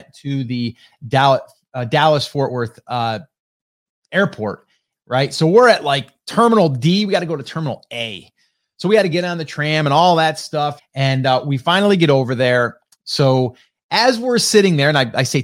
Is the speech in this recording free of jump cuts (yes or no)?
no